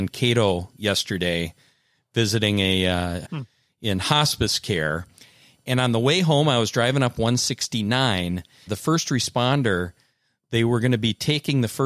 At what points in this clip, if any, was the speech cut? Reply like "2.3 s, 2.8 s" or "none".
3.2 s, 8.7 s